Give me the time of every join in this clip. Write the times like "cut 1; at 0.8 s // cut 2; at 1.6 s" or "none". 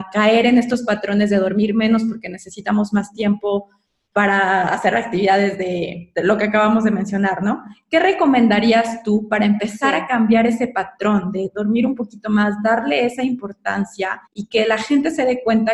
cut 1; at 6.1 s // cut 2; at 14.3 s